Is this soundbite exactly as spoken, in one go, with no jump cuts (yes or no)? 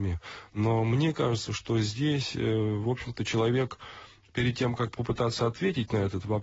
yes